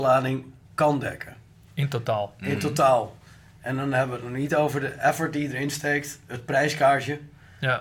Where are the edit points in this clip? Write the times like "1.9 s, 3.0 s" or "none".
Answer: none